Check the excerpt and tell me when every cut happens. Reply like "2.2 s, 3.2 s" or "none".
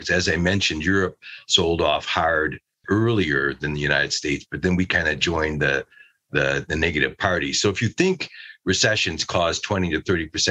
2.8 s